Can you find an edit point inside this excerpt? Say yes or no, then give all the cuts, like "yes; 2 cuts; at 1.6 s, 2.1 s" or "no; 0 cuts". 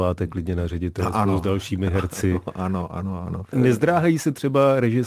yes; 1 cut; at 3.5 s